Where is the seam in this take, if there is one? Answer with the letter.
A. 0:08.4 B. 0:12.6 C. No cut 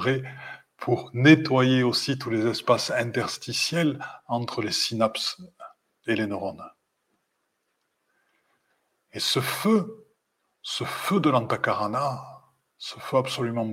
C